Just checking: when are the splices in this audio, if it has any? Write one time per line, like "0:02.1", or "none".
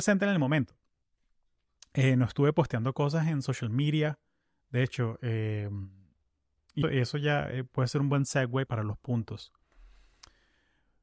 0:06.8
0:08.7